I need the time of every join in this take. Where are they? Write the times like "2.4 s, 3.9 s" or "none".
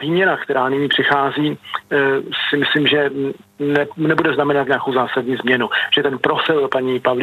none